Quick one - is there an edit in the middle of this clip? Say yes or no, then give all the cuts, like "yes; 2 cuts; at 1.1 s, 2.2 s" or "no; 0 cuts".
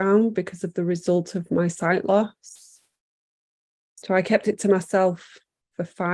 no; 0 cuts